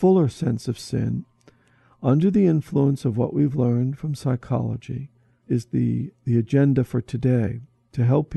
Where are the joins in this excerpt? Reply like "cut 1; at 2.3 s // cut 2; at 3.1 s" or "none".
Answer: none